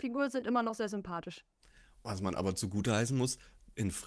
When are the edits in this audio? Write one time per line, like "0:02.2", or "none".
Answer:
none